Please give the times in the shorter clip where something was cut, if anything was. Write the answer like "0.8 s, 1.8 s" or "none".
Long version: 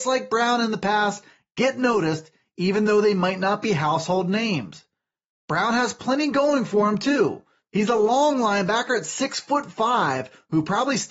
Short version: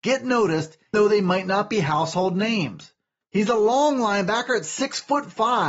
0.9 s, 3.2 s